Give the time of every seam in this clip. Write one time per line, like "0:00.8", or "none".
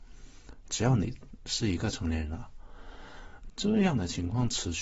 0:03.5